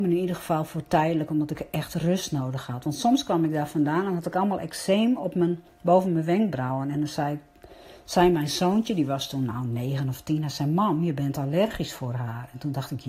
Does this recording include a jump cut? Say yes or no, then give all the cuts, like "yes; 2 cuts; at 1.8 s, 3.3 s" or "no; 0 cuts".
no; 0 cuts